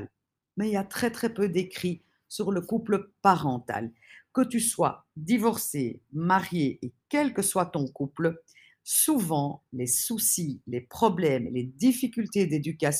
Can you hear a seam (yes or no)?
no